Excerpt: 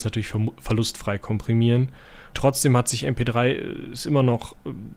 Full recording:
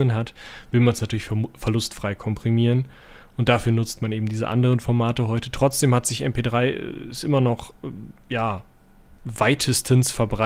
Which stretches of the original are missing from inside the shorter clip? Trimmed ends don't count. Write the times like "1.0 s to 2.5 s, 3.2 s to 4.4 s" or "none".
3.3 s to 5.5 s